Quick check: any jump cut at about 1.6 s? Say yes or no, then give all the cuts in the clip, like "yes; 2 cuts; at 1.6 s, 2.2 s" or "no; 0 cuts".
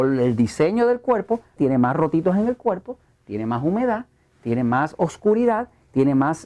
yes; 1 cut; at 1.6 s